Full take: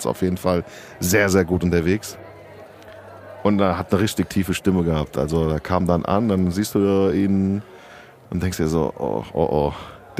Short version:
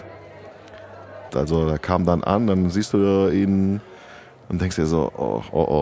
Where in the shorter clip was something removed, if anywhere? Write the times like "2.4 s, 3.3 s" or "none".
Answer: 1.3 s